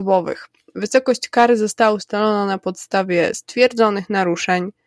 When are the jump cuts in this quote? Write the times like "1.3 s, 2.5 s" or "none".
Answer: none

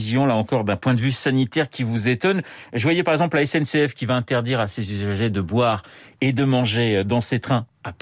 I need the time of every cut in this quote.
none

